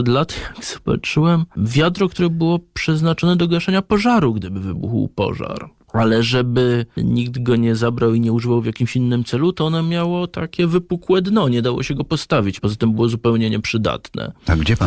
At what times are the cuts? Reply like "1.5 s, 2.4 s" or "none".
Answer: 12.6 s